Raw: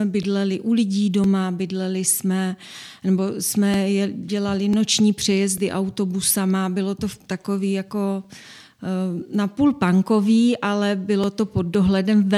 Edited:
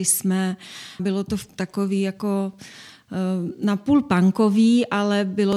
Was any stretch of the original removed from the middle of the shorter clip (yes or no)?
yes